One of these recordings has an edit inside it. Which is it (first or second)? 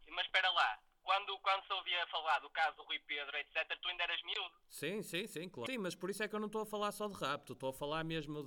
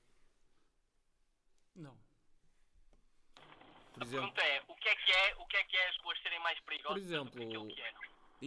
first